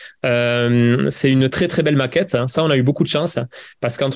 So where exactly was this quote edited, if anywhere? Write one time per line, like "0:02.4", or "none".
none